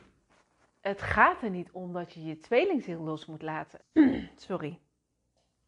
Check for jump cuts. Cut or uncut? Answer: cut